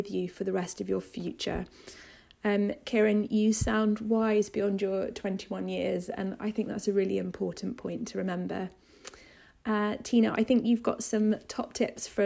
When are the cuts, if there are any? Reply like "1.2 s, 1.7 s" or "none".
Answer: none

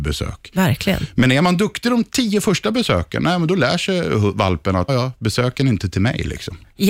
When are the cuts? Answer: 4.9 s

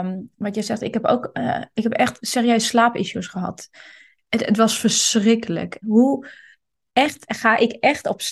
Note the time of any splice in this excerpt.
5.8 s

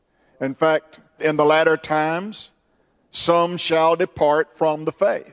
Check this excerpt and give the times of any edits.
1.2 s

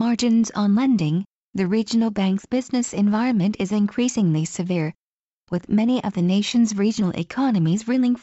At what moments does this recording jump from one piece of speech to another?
1.4 s

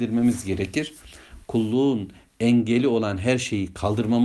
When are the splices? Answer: 1.4 s

